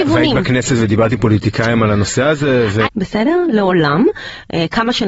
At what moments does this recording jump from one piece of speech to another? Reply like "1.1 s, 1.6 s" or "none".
2.9 s